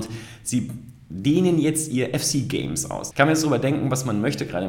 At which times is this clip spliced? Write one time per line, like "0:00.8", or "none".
0:03.1